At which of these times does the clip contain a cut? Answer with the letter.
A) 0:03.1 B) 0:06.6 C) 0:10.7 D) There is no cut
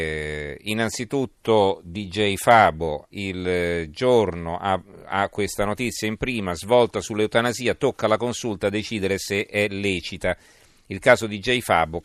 A